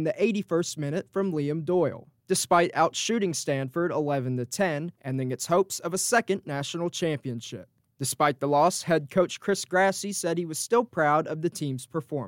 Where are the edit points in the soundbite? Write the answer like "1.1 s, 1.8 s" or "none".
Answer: 5.0 s